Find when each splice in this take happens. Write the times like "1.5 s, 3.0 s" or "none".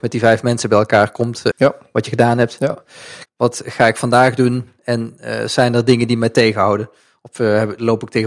1.5 s, 3.3 s